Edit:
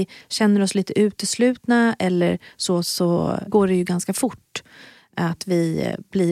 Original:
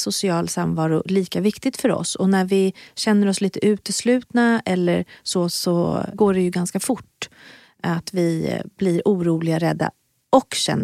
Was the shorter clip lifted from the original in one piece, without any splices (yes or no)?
yes